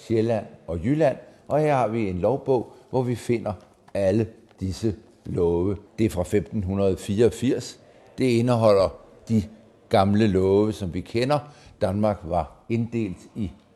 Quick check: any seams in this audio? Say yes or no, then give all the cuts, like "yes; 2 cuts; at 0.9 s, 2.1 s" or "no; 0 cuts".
yes; 1 cut; at 5.9 s